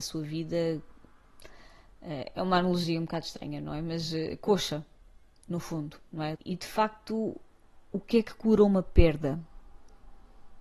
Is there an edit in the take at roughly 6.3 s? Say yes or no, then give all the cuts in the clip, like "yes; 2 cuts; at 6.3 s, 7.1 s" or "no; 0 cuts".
yes; 1 cut; at 6.3 s